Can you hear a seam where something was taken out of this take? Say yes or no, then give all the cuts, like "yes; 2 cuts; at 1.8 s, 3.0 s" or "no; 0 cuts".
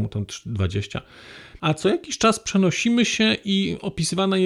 yes; 1 cut; at 1.6 s